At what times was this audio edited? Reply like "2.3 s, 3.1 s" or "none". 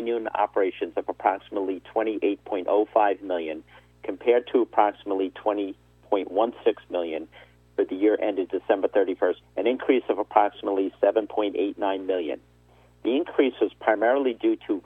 9.4 s